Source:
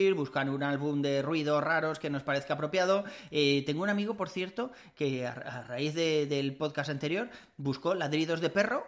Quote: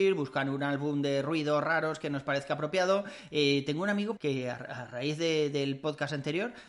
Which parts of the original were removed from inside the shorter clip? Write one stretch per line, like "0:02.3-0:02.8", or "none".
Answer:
0:04.2-0:04.9